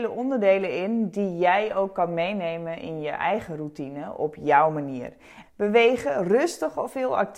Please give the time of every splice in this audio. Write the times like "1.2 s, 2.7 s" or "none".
5.4 s